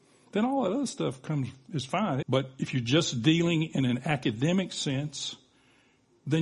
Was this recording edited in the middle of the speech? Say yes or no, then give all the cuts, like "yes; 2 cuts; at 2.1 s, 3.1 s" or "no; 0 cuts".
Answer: yes; 1 cut; at 2.2 s